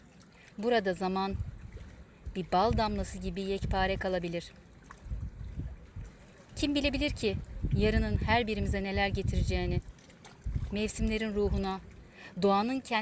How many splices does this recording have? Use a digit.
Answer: 0